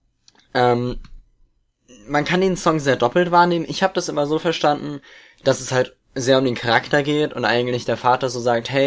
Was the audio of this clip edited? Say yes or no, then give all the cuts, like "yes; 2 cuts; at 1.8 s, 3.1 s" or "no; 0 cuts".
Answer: no; 0 cuts